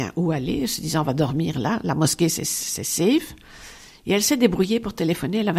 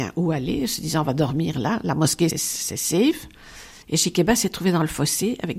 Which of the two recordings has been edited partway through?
second; 2 cuts; at 2.3 s, 3.8 s

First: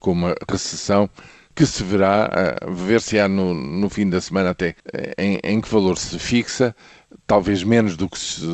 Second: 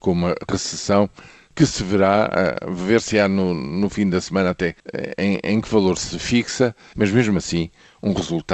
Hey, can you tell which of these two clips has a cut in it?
second; 1 cut; at 6.9 s

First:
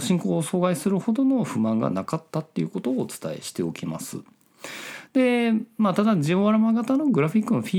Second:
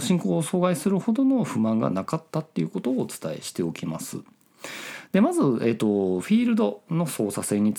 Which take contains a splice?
first; 1 cut; at 5.1 s

